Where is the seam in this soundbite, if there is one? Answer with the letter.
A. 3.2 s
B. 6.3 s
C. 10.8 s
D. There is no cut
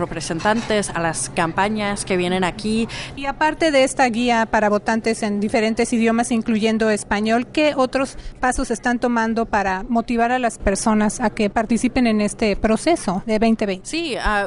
A